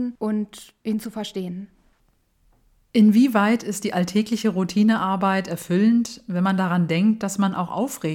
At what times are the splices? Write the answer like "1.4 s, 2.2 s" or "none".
none